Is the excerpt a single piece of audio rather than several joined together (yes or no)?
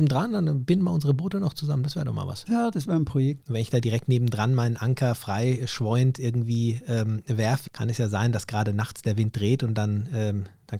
no